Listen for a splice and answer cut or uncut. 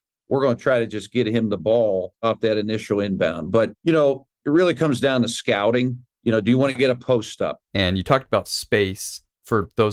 cut